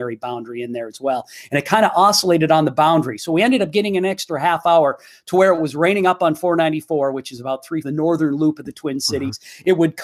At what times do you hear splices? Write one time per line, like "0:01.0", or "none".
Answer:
0:07.8